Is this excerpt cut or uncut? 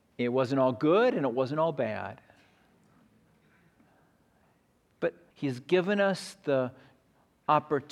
cut